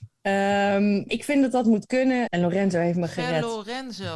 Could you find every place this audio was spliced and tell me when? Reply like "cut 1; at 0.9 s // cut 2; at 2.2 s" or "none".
cut 1; at 1.1 s // cut 2; at 2.3 s